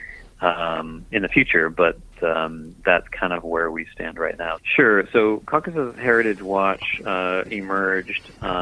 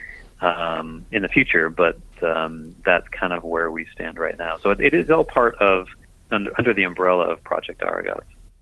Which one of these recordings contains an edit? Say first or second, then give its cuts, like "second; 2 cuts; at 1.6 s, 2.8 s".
first; 1 cut; at 4.6 s